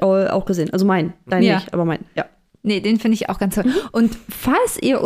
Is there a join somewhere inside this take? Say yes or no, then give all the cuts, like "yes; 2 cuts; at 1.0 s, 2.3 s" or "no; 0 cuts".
no; 0 cuts